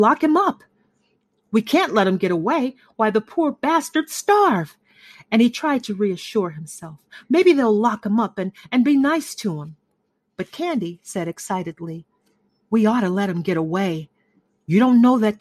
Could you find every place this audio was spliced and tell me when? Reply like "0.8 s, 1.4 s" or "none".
none